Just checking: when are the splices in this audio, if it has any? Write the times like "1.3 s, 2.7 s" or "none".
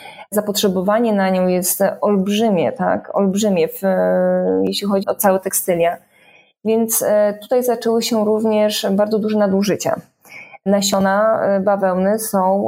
5.0 s